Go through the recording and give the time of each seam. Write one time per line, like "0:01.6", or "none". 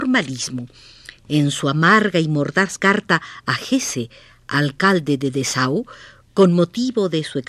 none